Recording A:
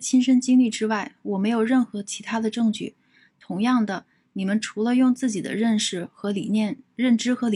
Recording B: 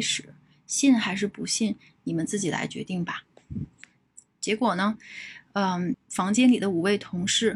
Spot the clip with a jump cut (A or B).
B